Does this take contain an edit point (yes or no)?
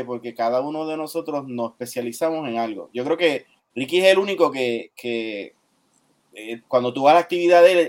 no